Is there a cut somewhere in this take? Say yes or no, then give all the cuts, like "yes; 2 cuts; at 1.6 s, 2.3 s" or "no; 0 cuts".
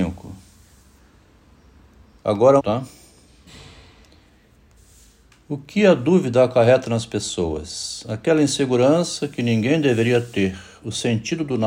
yes; 1 cut; at 2.6 s